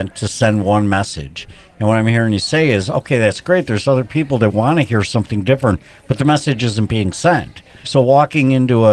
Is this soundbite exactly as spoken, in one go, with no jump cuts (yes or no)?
no